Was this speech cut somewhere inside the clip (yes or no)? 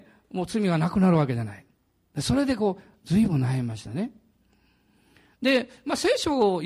no